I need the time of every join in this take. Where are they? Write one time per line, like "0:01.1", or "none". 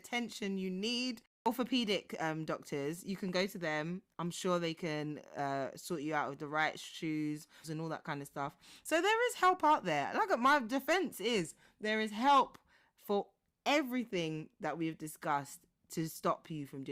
0:07.6